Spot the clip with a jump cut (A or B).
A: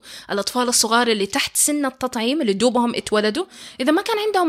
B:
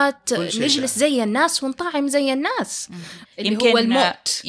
B